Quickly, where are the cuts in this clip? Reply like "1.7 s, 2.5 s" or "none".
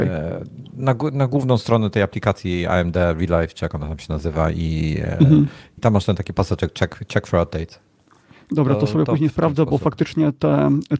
5.8 s